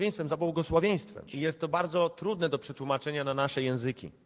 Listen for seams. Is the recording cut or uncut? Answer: cut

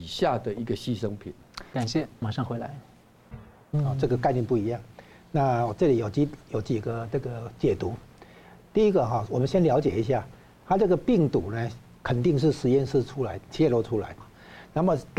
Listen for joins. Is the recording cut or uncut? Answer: cut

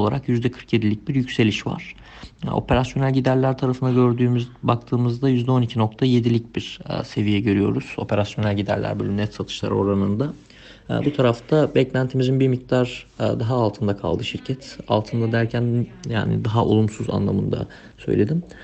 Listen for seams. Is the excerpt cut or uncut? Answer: uncut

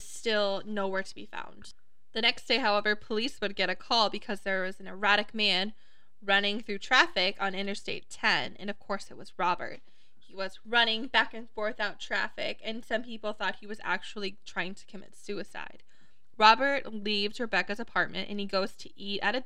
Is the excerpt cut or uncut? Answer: cut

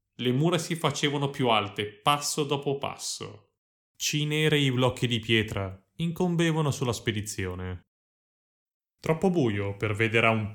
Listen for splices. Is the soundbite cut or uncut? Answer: uncut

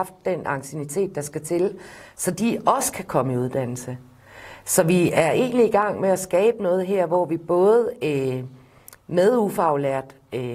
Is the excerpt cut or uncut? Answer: uncut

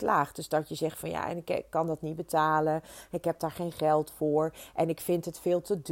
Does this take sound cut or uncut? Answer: uncut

